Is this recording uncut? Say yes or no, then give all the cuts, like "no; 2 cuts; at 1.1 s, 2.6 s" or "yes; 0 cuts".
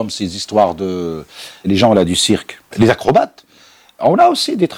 no; 1 cut; at 2.7 s